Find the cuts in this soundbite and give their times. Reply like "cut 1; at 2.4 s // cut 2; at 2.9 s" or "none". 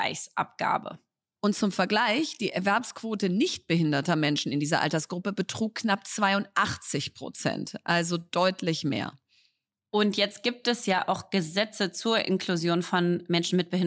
cut 1; at 1.4 s